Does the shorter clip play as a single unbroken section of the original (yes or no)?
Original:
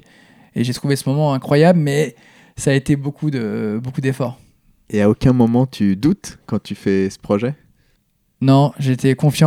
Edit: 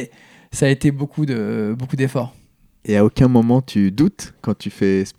yes